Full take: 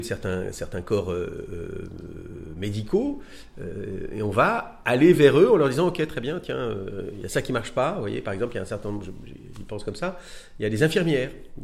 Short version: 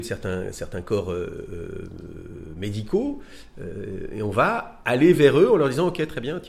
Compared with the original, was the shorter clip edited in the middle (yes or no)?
no